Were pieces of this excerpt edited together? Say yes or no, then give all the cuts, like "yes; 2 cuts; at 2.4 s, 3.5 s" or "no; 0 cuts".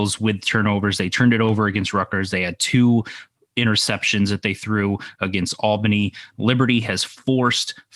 no; 0 cuts